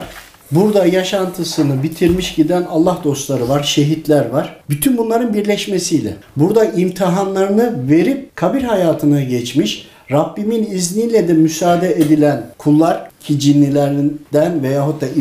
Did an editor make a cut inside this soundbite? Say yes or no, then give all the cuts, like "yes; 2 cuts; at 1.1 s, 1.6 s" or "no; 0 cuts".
yes; 1 cut; at 4.6 s